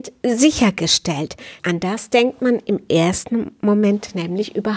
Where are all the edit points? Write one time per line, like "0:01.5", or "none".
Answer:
0:01.6